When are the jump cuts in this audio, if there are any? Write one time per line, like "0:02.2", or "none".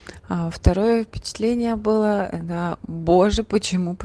none